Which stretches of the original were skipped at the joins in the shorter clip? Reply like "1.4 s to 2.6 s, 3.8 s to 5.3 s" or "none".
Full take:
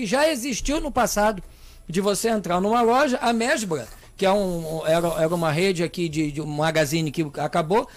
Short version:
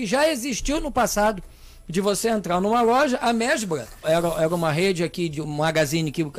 4.0 s to 4.8 s, 6.1 s to 6.3 s